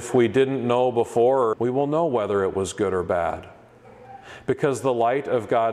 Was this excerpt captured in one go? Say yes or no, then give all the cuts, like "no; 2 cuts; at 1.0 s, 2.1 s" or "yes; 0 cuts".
no; 1 cut; at 1.5 s